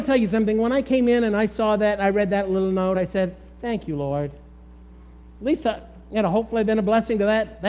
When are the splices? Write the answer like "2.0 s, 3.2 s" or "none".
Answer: none

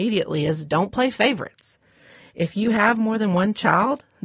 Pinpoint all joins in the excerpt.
none

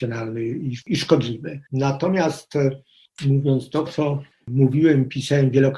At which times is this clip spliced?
1.7 s, 3.9 s

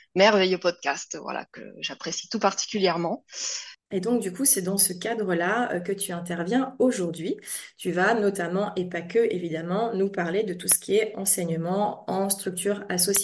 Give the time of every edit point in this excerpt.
3.7 s

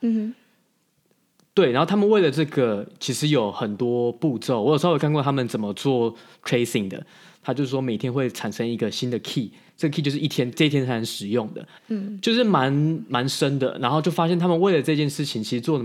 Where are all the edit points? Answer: 10.5 s, 11.8 s

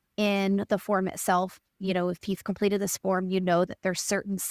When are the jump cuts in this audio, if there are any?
none

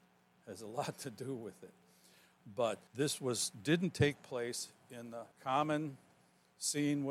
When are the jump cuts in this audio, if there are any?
2.9 s, 5.3 s

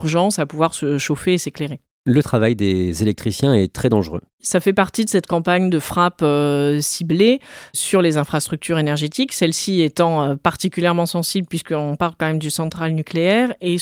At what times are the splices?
4.3 s

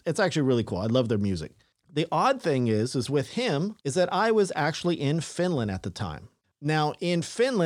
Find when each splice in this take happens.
3.8 s, 6.4 s

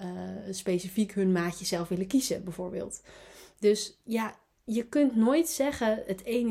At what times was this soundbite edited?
none

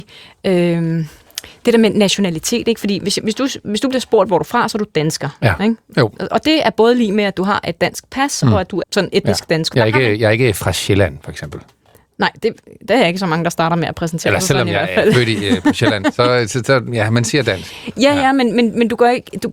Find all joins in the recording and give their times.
8.8 s

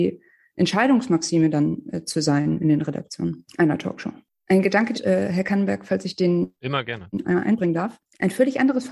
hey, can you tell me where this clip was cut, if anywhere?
4.9 s, 7.2 s

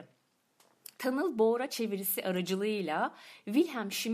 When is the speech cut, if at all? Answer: 0.9 s

